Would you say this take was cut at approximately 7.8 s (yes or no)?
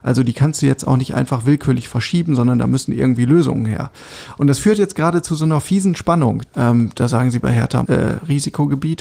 yes